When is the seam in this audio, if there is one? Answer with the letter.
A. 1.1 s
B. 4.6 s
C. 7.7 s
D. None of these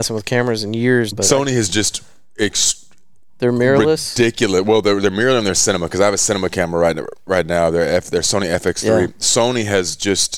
A